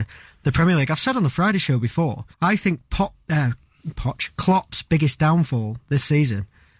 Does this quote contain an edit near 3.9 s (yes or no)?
no